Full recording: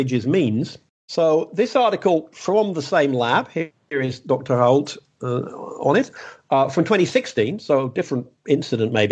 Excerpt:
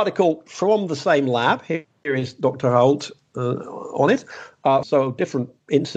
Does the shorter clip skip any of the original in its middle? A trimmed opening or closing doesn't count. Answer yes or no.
yes